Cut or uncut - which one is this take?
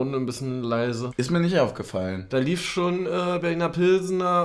cut